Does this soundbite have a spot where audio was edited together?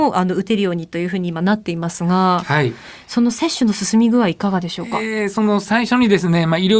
no; 0 cuts

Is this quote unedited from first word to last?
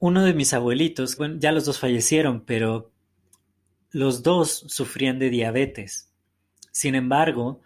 no; 1 cut; at 1.2 s

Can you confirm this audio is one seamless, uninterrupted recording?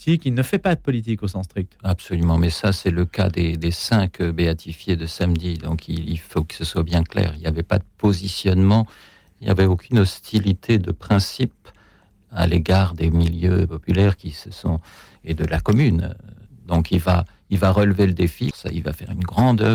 no; 2 cuts; at 16.5 s, 18.5 s

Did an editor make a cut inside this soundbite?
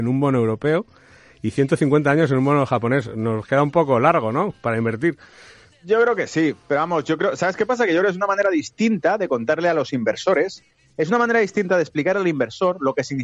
no; 0 cuts

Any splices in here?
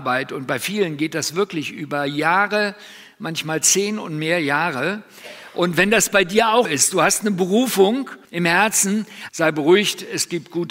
yes; 3 cuts; at 6.7 s, 8.3 s, 9.3 s

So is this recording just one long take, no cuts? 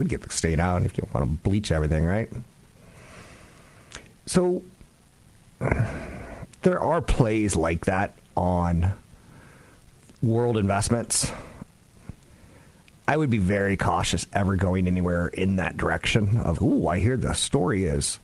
no; 1 cut; at 16.5 s

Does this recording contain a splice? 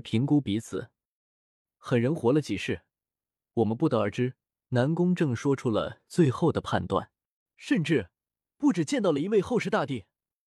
yes; 2 cuts; at 4.6 s, 7.5 s

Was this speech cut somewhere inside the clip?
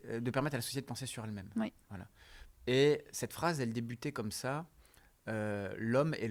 yes; 1 cut; at 2.5 s

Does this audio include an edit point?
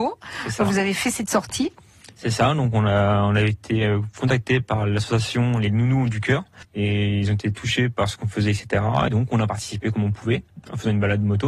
yes; 2 cuts; at 6.6 s, 9.1 s

